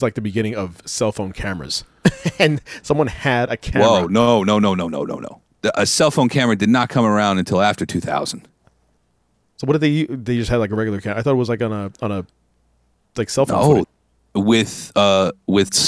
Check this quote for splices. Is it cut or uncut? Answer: cut